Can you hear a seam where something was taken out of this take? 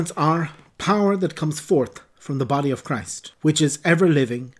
yes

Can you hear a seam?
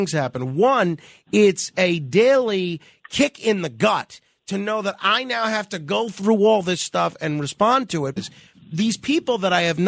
yes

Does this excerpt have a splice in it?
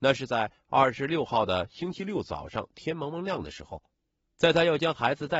yes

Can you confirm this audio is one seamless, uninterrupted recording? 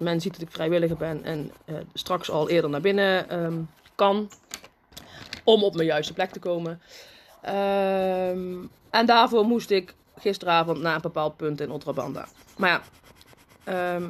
yes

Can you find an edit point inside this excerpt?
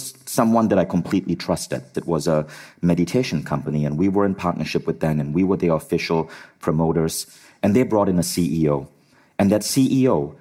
yes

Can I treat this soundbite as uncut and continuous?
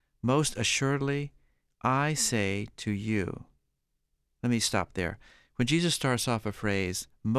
yes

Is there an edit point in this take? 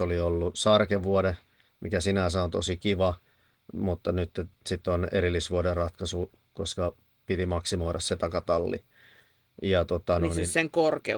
no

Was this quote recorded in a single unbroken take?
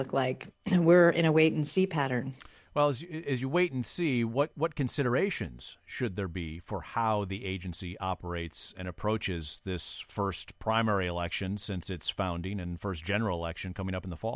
yes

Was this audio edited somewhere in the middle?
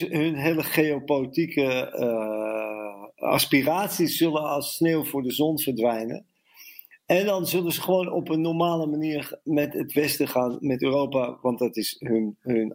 no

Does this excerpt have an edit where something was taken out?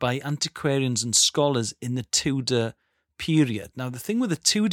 no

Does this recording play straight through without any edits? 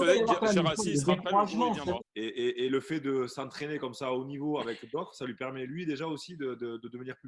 no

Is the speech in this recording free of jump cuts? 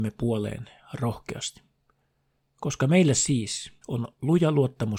no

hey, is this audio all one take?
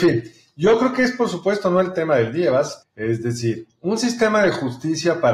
no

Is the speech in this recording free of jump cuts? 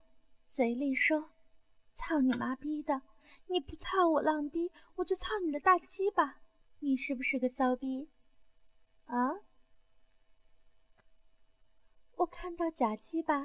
no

